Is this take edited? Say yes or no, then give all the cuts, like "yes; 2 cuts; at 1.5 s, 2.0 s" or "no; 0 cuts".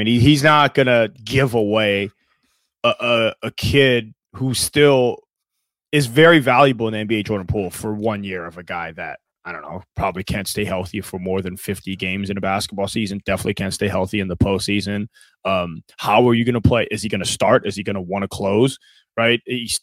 no; 0 cuts